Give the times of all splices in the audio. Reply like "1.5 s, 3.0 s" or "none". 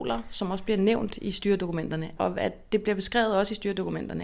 2.2 s